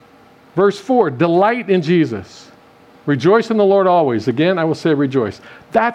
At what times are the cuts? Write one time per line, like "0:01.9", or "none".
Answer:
none